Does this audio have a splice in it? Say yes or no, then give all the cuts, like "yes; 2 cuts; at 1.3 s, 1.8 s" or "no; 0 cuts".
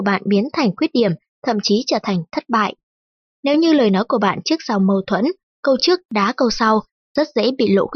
yes; 1 cut; at 3.3 s